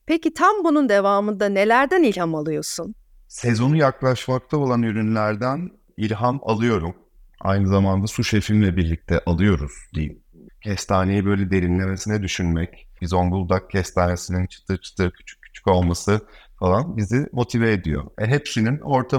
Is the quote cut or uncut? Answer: cut